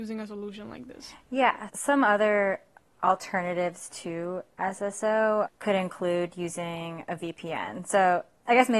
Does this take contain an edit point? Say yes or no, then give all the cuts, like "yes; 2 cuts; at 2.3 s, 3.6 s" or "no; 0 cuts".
yes; 1 cut; at 1.7 s